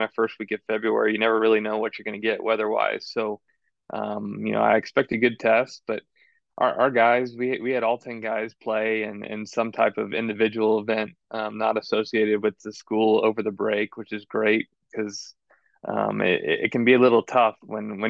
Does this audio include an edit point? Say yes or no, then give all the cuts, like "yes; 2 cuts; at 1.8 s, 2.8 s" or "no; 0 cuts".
no; 0 cuts